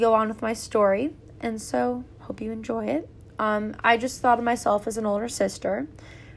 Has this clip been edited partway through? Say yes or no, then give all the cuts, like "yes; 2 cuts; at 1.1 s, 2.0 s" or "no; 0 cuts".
yes; 1 cut; at 3.3 s